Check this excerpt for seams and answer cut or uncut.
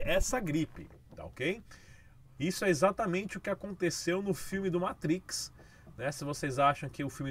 cut